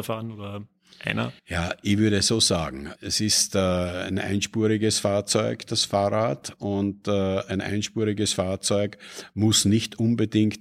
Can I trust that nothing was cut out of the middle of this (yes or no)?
no